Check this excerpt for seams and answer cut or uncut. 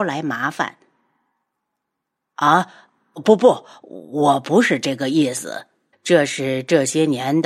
cut